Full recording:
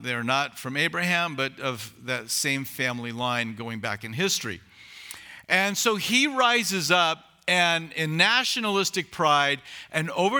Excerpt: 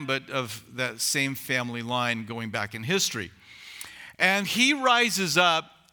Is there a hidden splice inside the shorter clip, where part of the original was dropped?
yes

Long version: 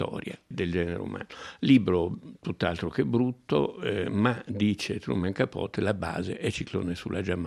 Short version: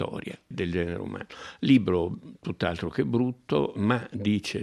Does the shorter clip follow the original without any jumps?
no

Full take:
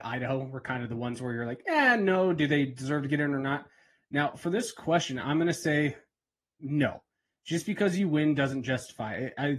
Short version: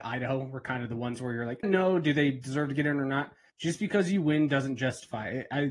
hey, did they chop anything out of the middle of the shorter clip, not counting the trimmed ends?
yes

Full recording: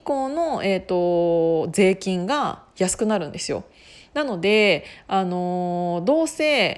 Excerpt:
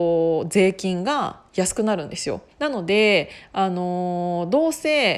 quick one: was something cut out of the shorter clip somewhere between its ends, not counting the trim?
yes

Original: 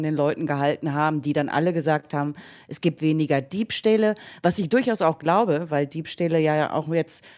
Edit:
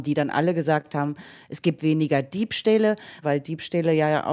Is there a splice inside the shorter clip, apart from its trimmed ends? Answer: yes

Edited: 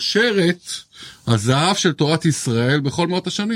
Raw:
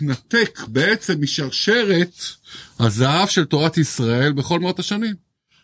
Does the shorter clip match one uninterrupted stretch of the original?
yes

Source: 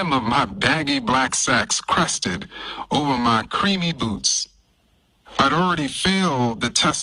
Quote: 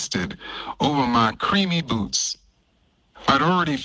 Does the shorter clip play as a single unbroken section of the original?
yes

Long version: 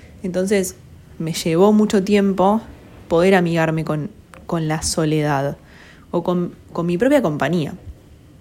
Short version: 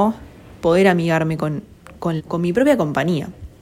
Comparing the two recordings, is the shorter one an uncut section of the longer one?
no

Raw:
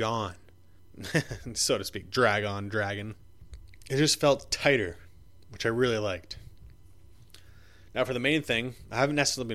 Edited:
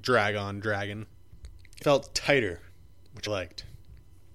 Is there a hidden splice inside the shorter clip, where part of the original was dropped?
yes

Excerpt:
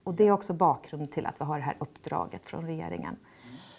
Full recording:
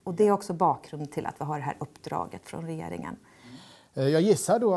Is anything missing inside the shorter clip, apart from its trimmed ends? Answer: no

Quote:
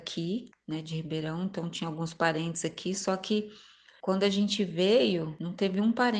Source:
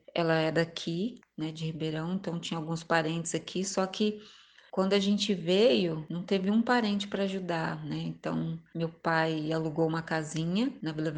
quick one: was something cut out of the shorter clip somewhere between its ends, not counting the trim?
no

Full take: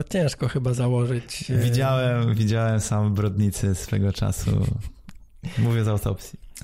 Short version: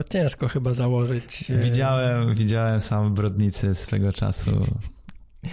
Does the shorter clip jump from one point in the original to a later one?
no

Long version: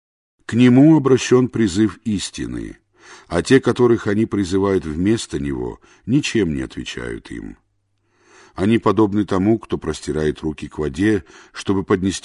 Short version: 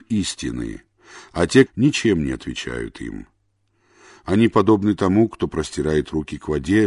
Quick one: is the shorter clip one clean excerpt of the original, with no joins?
no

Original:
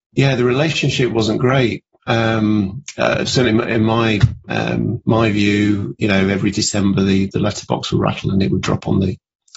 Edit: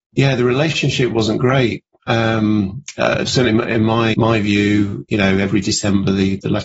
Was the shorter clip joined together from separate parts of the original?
yes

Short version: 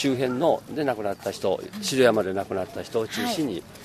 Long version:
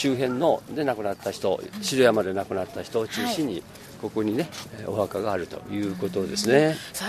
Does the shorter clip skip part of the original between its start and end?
no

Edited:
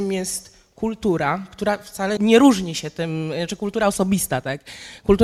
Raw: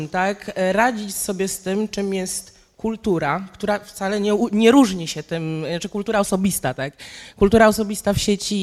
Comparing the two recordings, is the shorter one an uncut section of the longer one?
no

